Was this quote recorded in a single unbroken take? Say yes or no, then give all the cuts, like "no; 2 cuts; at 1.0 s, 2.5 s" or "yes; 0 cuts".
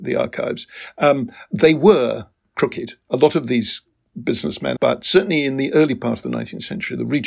no; 1 cut; at 4.8 s